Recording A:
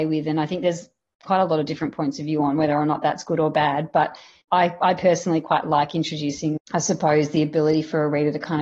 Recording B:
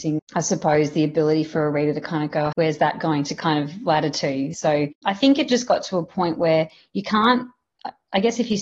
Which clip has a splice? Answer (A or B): B